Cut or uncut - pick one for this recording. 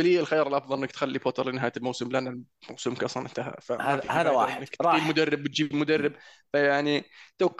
uncut